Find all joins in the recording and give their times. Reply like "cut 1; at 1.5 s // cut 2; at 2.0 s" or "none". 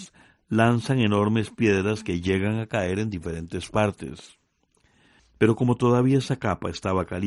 cut 1; at 5.2 s